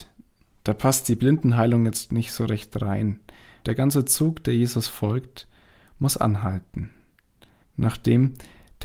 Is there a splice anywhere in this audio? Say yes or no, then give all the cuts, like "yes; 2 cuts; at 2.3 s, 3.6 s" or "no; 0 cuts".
yes; 2 cuts; at 3.6 s, 7.6 s